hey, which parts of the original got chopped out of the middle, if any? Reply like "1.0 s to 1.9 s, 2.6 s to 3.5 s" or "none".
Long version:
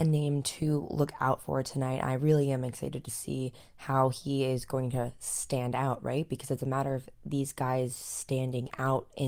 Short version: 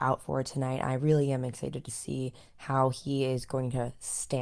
none